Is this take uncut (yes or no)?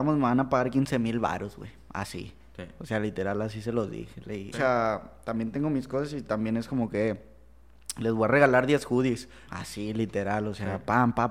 no